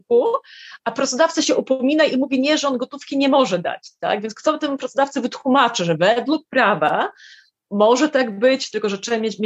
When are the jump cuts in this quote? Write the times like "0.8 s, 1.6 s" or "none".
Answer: none